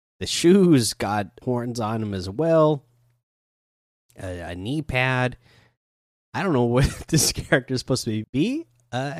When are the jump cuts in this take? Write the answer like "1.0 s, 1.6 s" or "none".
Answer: 1.4 s, 8.2 s